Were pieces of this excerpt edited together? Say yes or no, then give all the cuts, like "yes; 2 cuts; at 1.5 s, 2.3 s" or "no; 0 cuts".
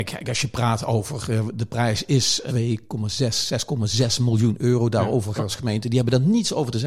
yes; 2 cuts; at 2.5 s, 5.4 s